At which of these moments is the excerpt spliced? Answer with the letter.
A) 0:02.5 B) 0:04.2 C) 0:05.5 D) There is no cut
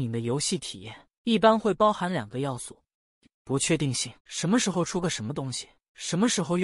B